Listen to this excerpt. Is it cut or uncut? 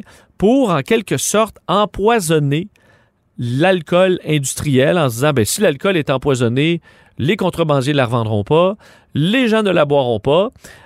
uncut